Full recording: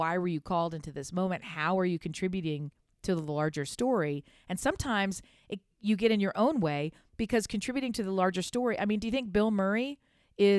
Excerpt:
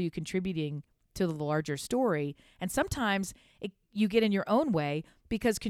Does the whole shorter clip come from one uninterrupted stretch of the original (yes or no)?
yes